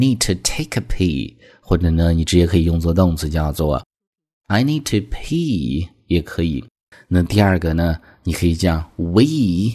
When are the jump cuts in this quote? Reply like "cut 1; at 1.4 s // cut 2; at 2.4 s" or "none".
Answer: cut 1; at 6.9 s